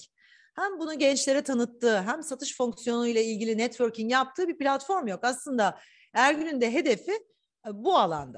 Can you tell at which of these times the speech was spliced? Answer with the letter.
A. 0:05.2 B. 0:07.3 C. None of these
C